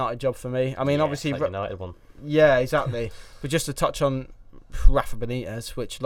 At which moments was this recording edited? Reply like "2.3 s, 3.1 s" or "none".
none